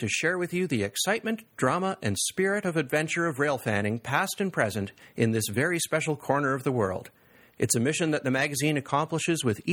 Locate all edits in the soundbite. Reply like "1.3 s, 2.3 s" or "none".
none

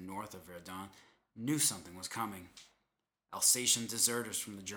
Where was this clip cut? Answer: none

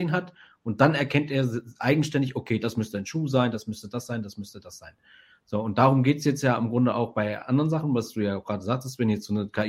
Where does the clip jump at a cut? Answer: 3.5 s

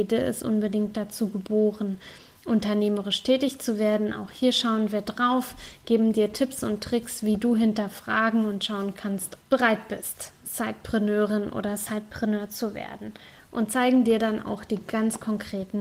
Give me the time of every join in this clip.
9.4 s

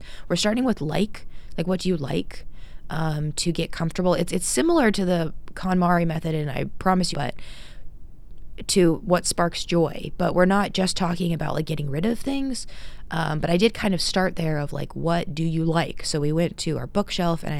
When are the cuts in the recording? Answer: 7.1 s

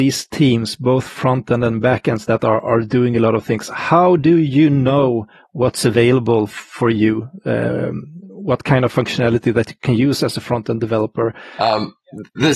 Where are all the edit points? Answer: none

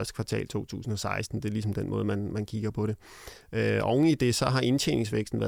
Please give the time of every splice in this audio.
none

